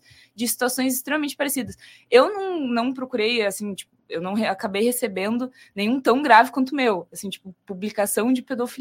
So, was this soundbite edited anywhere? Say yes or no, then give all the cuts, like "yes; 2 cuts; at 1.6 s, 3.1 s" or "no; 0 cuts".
no; 0 cuts